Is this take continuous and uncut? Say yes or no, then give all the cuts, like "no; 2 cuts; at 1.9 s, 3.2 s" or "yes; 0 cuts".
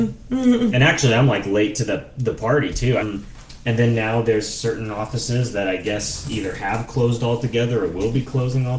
no; 1 cut; at 3.0 s